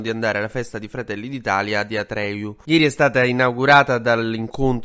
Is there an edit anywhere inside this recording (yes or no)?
no